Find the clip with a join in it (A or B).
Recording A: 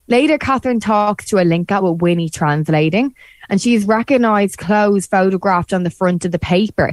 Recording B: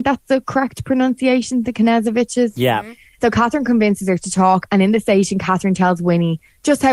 B